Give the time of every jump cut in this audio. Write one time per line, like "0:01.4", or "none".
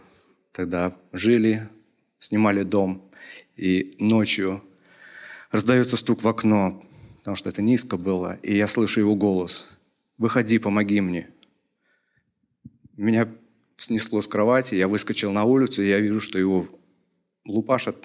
none